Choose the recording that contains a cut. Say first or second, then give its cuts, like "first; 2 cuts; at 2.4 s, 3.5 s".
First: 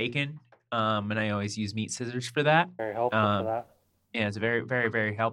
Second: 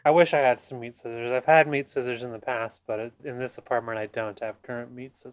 second; 1 cut; at 3.2 s